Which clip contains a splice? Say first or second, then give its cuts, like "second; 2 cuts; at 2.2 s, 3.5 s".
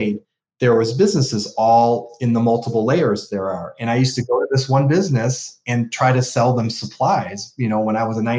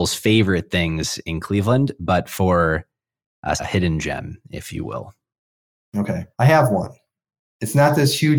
second; 2 cuts; at 3.6 s, 6.3 s